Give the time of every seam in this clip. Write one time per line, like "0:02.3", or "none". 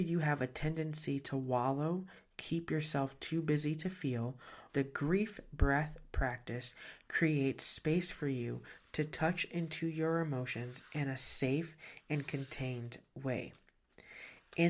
0:04.7